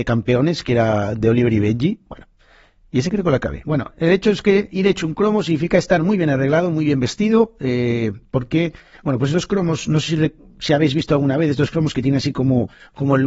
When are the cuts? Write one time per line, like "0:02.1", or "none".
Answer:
none